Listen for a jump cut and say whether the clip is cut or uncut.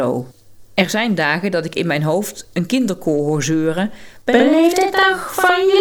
uncut